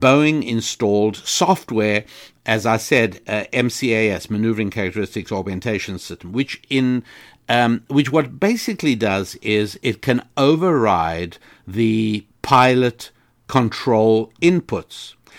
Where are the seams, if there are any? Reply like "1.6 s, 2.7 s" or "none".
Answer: none

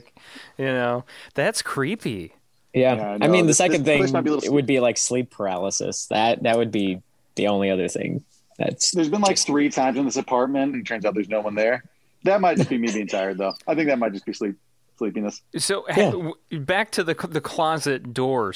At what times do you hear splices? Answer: 10.7 s

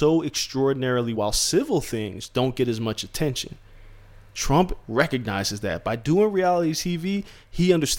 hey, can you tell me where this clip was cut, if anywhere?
1.1 s

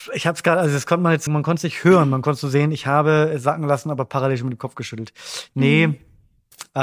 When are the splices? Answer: 1.3 s

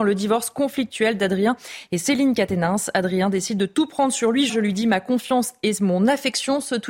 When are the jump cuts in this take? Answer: 4.5 s

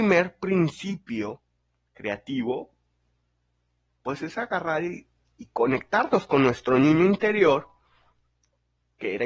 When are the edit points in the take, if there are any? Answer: none

